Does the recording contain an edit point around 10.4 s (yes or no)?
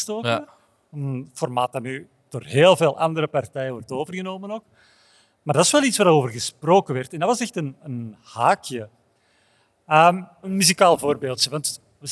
yes